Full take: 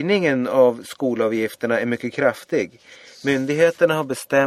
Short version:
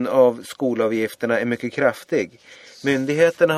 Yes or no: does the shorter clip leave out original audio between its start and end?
no